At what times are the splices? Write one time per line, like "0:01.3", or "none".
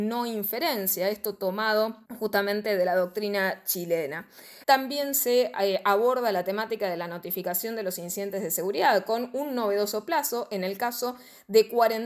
0:02.1
0:04.6